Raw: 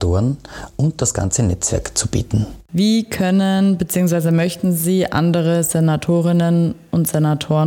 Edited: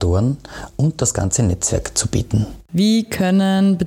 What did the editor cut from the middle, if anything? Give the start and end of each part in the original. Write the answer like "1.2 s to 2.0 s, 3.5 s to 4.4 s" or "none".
none